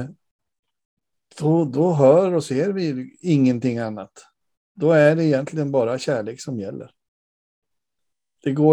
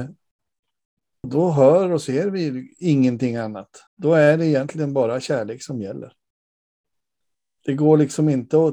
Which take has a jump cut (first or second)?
second